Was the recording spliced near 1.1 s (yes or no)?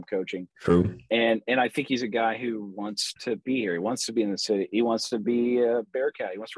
yes